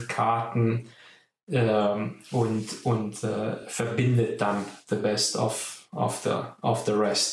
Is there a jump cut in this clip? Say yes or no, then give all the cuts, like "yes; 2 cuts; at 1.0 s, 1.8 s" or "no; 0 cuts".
no; 0 cuts